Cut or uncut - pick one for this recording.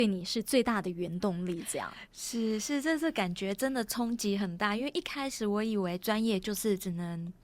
uncut